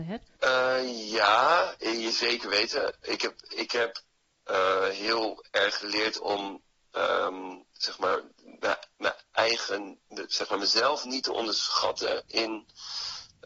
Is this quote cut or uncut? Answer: uncut